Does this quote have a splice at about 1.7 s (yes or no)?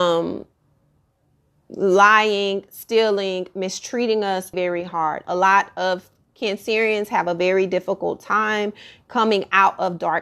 no